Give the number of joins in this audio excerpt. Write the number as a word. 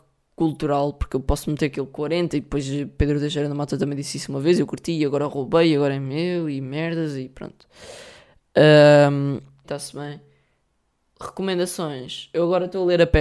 one